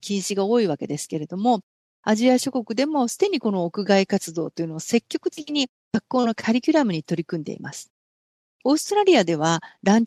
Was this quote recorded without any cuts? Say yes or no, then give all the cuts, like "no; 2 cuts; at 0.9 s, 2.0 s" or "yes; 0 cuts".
yes; 0 cuts